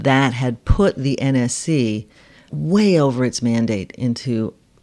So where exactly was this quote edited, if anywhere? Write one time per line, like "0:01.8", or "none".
0:02.5

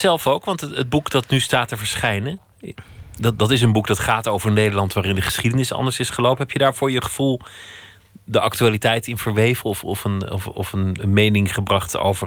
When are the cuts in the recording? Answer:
none

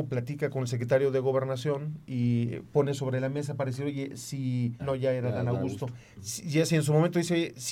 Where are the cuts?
0:04.8

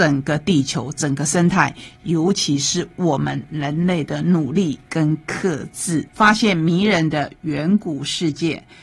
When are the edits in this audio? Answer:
0:06.1

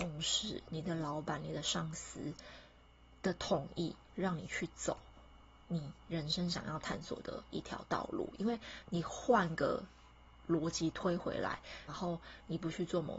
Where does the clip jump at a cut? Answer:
0:11.9

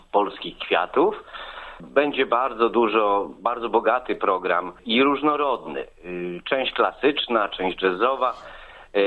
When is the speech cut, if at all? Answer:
0:01.8
0:07.5

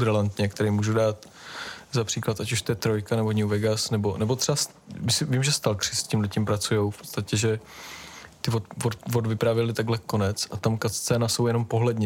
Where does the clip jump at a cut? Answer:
none

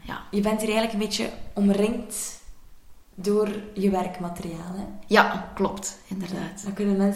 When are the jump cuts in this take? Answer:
none

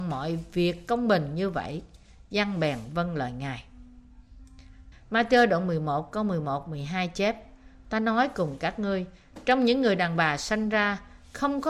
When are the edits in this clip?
0:04.9
0:07.8

